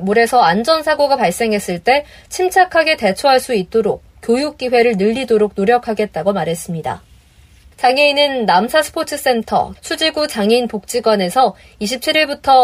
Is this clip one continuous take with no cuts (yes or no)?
no